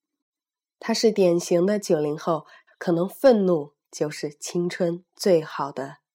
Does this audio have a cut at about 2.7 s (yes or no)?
yes